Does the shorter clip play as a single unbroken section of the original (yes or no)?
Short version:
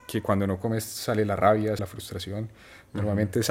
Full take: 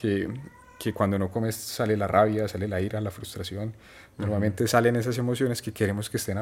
no